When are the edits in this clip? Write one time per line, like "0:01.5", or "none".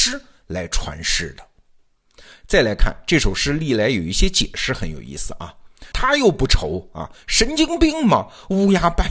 0:05.9